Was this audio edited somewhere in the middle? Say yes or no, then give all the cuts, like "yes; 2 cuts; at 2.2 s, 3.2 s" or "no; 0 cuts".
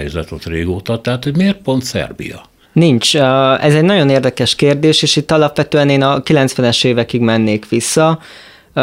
yes; 1 cut; at 2.6 s